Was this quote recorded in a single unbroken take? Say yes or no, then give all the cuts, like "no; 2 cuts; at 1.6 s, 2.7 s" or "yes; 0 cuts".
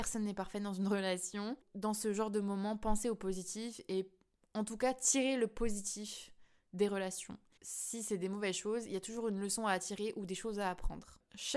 no; 1 cut; at 7.6 s